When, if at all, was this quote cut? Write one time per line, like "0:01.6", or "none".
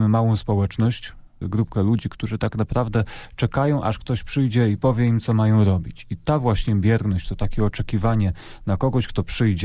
0:01.4